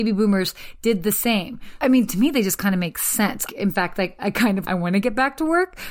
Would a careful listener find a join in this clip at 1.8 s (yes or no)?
yes